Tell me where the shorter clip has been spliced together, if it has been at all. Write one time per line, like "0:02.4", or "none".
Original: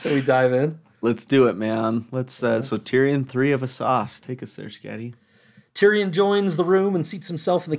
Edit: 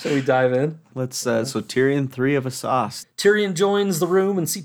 0:00.9
0:03.0

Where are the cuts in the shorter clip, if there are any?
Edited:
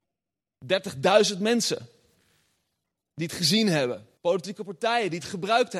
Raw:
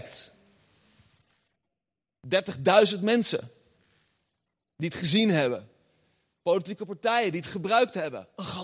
0:04.2

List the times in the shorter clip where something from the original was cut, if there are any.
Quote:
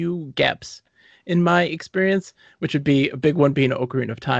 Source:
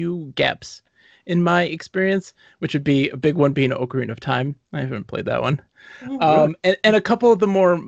none

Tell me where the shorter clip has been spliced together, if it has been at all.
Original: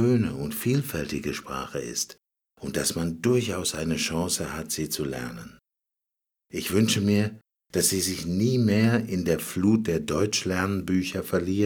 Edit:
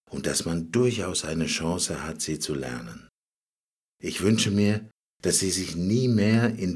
none

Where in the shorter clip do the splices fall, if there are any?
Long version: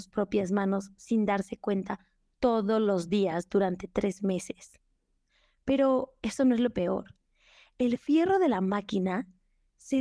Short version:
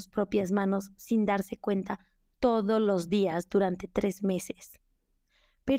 none

